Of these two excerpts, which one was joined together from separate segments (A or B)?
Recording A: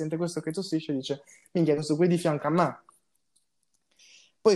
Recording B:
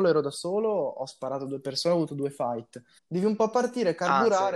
B